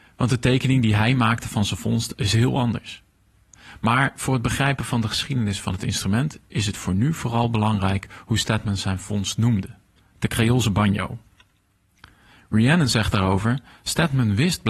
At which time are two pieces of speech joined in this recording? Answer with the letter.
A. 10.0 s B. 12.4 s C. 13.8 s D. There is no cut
A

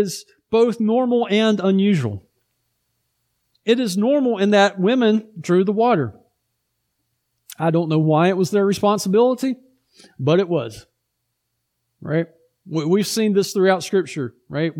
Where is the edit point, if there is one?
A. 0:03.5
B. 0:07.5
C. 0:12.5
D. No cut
D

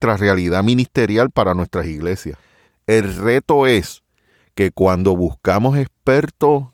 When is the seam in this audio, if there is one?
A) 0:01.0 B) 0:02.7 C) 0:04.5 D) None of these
B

